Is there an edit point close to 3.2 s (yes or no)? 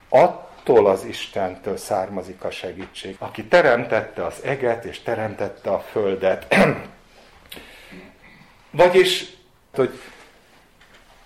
yes